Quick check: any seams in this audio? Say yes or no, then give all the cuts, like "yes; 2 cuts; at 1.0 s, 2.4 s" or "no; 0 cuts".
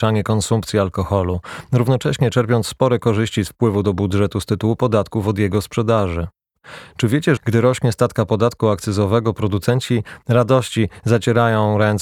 yes; 1 cut; at 7.4 s